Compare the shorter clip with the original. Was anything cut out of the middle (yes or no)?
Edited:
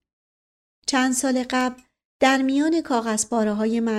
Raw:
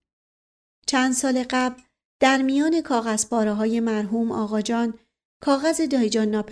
no